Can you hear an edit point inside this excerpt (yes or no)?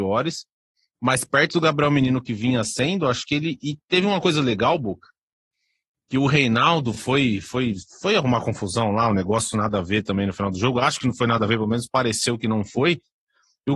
no